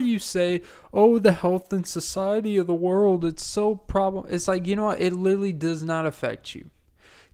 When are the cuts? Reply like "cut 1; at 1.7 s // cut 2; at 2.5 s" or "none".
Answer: none